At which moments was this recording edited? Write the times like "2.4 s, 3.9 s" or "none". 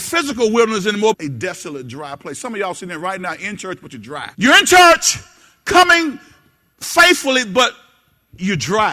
1.1 s, 4.3 s